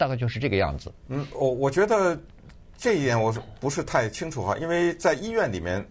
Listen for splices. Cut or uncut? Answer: uncut